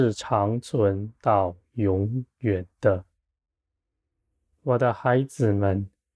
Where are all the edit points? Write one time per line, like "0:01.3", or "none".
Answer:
none

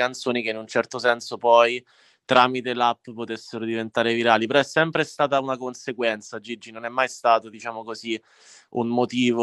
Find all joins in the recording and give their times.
none

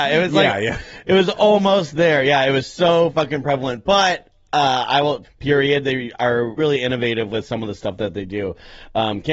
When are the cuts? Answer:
0:05.2
0:06.6

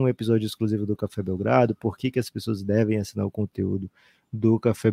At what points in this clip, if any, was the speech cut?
none

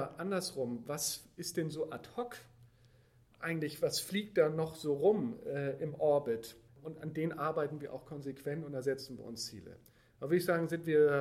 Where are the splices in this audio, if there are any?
0:06.7

